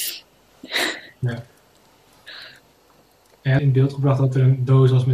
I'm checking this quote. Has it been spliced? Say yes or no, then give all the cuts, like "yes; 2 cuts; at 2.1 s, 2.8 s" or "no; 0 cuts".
yes; 1 cut; at 3.6 s